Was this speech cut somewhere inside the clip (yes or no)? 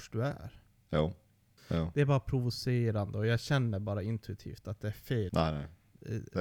yes